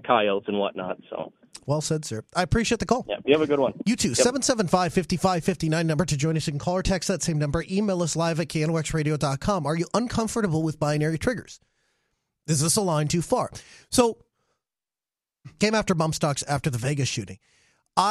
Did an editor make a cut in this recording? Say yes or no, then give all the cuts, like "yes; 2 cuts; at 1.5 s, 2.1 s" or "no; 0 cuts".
yes; 1 cut; at 15.6 s